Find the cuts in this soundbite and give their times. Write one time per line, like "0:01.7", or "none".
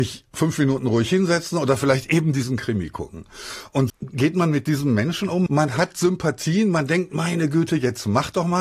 0:03.9
0:05.5